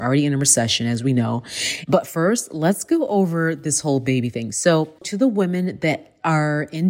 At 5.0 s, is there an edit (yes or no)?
no